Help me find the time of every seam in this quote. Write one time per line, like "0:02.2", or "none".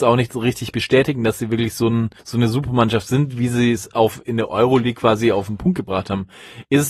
0:02.2

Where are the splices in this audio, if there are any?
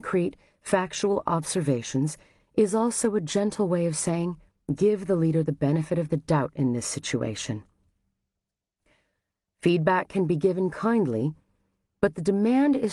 0:04.5
0:09.5

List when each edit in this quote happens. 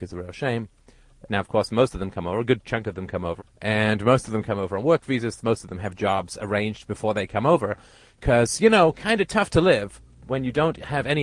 0:01.3
0:03.4

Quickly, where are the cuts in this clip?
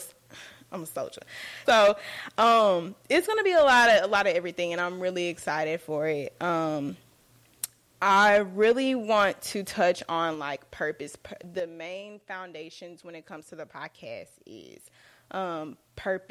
0:01.7

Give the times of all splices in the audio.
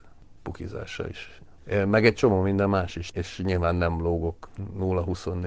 0:03.1

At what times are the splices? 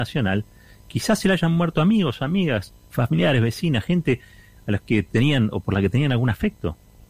0:05.6

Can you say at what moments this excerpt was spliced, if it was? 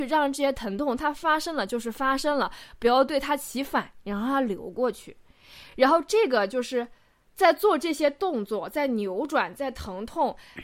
none

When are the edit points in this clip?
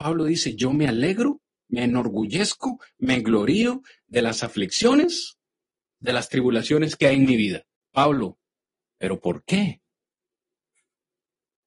0:06.0

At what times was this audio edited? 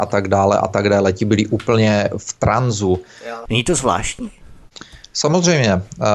0:03.5

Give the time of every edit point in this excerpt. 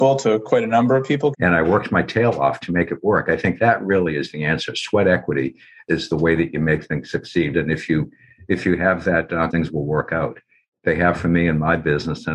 0:01.3
0:07.5
0:09.5

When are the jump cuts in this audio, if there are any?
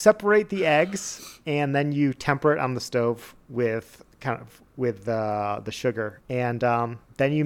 0:06.2

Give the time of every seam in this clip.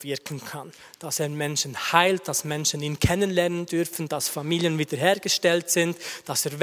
none

